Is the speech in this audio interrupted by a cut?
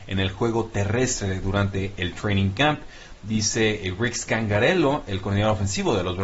no; 0 cuts

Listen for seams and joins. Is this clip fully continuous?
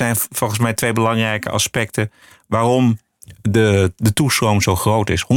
yes; 0 cuts

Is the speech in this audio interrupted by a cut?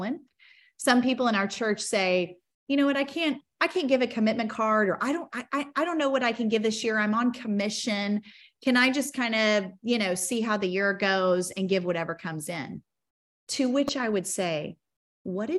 no; 0 cuts

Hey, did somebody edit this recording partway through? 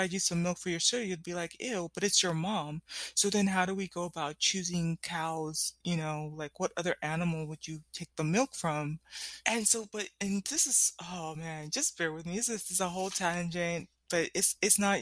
yes; 1 cut; at 9.4 s

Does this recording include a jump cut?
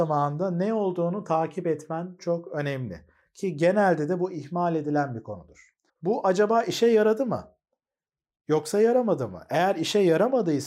yes; 2 cuts; at 2.2 s, 5.9 s

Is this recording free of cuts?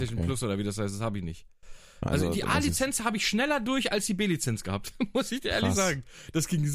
no; 1 cut; at 2.1 s

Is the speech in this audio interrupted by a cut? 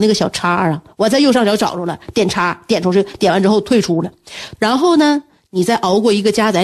yes; 1 cut; at 4.6 s

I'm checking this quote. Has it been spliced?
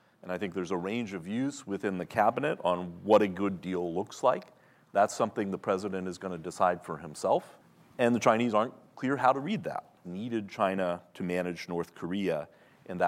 yes; 1 cut; at 10.0 s

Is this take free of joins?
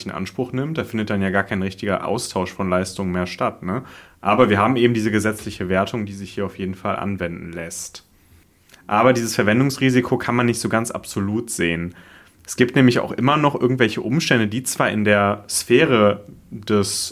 yes; 0 cuts

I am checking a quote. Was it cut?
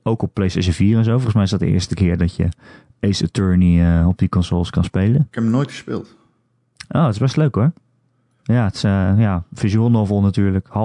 no; 0 cuts

